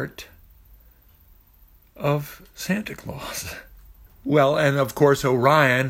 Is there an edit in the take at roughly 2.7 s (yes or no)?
no